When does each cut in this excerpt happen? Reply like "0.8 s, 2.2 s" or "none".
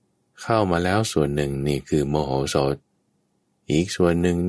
none